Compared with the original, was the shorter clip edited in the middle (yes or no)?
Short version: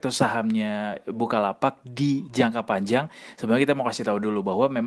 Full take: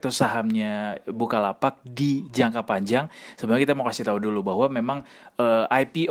no